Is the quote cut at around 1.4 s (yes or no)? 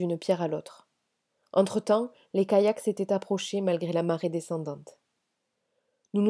no